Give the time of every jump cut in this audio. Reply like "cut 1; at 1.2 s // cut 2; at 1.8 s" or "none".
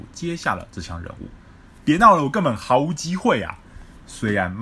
none